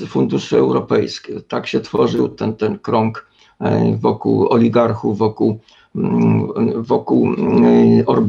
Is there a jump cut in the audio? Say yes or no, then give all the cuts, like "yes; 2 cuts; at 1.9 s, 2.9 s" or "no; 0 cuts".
no; 0 cuts